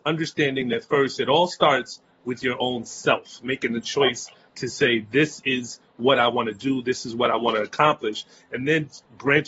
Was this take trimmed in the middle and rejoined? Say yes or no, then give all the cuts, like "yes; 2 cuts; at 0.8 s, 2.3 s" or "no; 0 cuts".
no; 0 cuts